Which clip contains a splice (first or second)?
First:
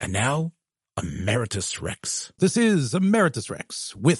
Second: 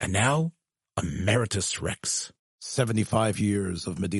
first